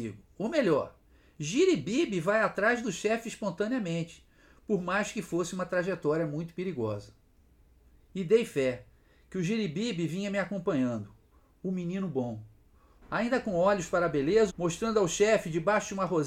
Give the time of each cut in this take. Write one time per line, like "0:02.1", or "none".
0:13.0
0:14.5